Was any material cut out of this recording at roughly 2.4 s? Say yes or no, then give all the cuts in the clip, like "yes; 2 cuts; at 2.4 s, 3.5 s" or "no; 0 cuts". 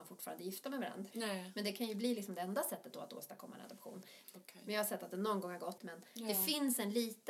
no; 3 cuts; at 1.1 s, 4.2 s, 5.8 s